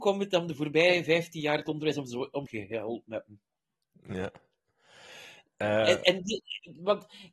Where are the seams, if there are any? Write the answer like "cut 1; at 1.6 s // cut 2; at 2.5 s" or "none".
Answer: cut 1; at 2.5 s

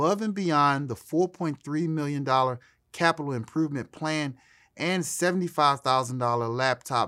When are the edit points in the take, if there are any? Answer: none

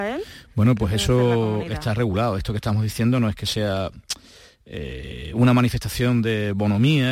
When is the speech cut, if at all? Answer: none

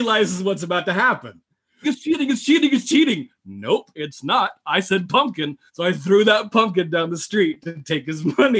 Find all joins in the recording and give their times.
cut 1; at 1.8 s // cut 2; at 5.7 s

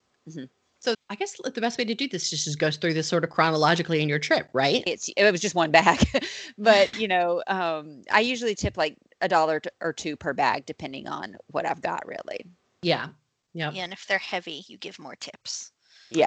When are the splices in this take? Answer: cut 1; at 0.9 s // cut 2; at 4.9 s

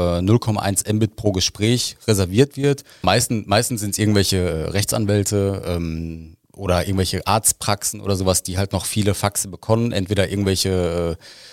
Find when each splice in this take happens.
cut 1; at 3.0 s

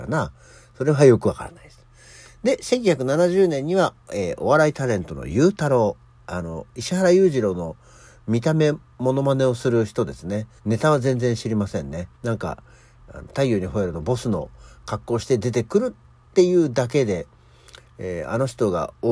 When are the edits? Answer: cut 1; at 10.6 s // cut 2; at 12.1 s

